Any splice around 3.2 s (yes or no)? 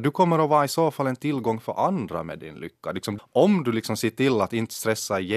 yes